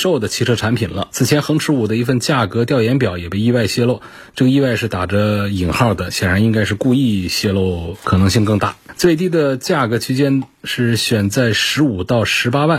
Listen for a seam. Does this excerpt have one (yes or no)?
yes